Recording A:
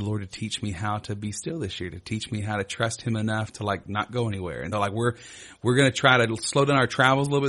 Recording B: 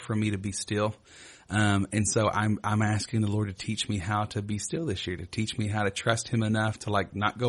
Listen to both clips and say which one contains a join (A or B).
A